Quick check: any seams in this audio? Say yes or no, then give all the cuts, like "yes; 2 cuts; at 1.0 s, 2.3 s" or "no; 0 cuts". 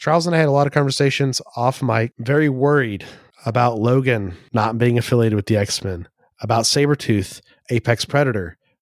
no; 0 cuts